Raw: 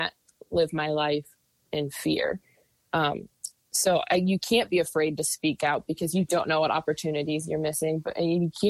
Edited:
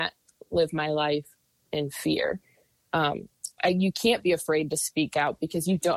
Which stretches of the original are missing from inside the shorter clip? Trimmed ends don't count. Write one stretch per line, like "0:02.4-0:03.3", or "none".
0:03.6-0:04.0